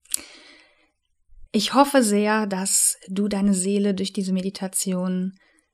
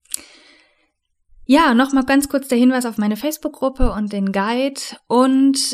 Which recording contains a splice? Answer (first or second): first